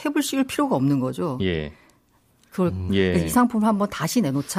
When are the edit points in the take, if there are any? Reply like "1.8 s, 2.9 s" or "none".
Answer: 1.4 s, 2.9 s